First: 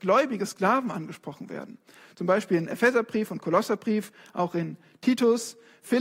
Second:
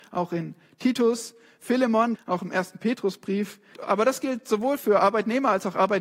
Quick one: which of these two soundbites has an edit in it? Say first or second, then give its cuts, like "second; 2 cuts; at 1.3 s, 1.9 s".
second; 2 cuts; at 2.1 s, 3.7 s